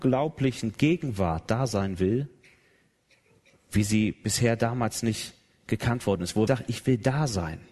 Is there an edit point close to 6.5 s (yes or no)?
yes